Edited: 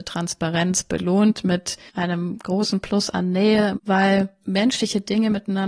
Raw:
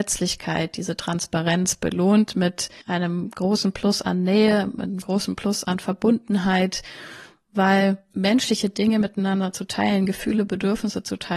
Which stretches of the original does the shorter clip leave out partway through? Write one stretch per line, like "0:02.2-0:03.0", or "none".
0:04.7-0:07.4